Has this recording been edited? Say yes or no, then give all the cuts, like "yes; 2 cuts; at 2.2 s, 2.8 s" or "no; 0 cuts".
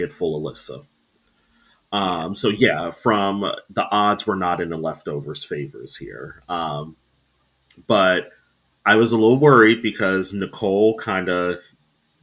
no; 0 cuts